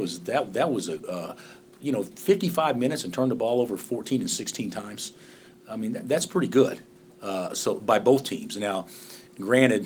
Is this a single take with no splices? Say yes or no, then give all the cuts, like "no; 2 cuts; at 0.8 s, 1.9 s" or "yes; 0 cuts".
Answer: yes; 0 cuts